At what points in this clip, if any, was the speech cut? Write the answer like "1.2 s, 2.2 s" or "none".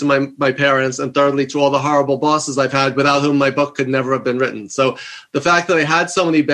none